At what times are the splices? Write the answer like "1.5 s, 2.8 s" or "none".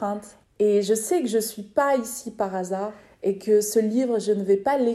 none